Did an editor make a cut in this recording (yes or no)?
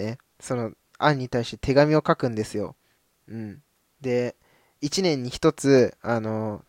no